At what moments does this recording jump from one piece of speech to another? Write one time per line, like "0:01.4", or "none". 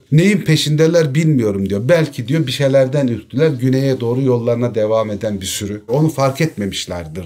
0:05.9